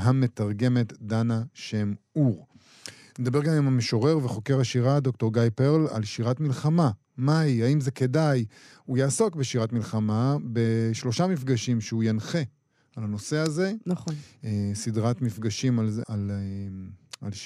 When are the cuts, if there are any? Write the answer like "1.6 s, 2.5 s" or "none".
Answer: 16.0 s